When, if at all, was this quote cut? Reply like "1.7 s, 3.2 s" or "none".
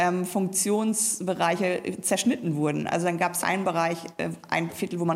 3.4 s